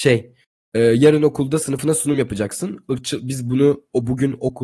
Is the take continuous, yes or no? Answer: yes